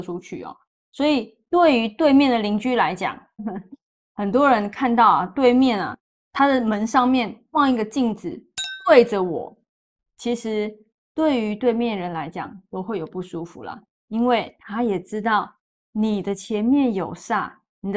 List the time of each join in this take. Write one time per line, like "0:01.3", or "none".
0:03.4